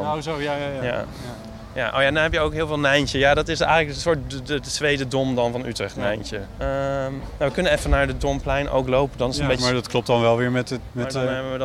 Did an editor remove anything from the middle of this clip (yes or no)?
yes